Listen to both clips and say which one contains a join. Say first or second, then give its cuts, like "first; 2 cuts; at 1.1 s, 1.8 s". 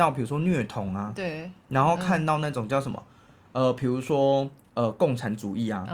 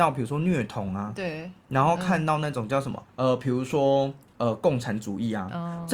second; 1 cut; at 3.0 s